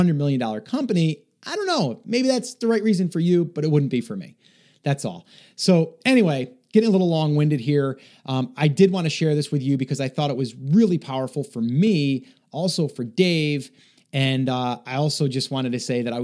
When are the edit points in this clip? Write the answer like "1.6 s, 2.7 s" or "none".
none